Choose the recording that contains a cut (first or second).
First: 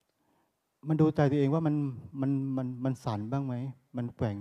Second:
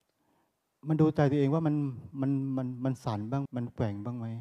second